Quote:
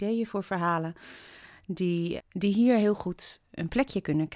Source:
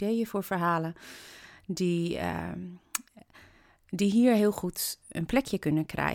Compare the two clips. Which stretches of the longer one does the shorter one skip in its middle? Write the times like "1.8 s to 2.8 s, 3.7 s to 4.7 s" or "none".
2.2 s to 3.7 s